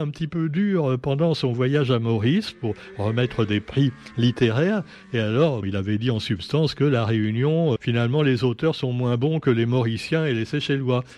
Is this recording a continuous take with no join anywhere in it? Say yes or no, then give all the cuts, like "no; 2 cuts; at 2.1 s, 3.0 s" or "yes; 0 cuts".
no; 2 cuts; at 5.6 s, 7.8 s